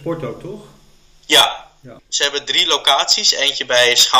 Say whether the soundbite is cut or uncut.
cut